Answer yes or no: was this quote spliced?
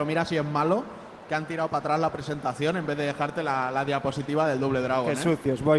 no